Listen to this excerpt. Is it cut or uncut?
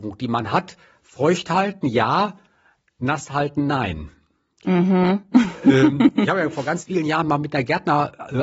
uncut